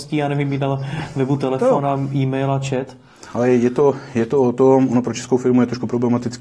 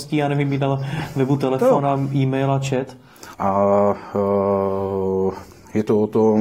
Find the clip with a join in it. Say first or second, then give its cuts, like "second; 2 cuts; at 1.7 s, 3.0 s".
second; 1 cut; at 3.3 s